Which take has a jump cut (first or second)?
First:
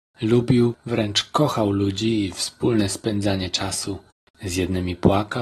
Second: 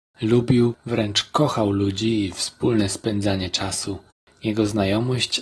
first